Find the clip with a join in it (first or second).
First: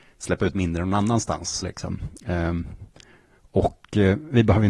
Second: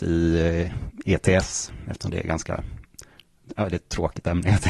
first